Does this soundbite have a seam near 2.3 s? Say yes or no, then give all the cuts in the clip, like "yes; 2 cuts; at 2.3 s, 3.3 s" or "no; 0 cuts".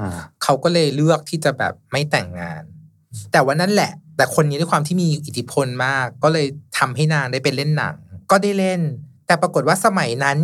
no; 0 cuts